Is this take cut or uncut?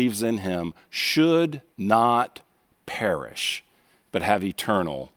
cut